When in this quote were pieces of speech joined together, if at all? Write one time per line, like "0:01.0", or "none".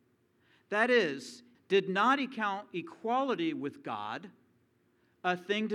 0:01.5

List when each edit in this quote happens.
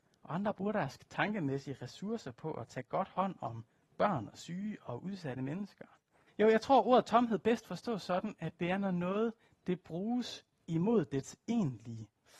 0:06.3

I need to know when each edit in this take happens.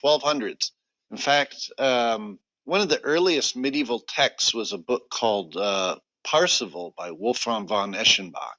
0:01.0

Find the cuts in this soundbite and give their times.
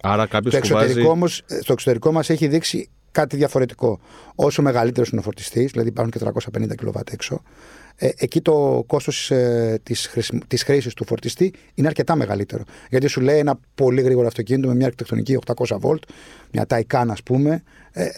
none

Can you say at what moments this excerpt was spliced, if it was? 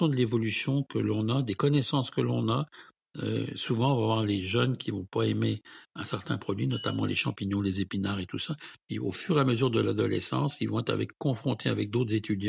none

